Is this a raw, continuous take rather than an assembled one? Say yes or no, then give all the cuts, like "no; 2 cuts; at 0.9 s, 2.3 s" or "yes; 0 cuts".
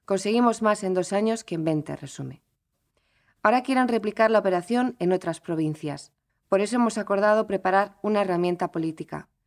no; 1 cut; at 6.3 s